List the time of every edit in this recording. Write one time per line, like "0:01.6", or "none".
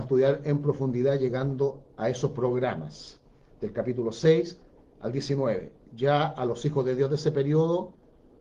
none